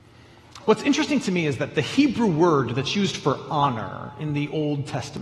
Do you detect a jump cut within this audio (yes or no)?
no